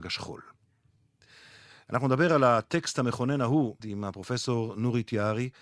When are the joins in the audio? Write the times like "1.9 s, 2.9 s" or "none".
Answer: 3.8 s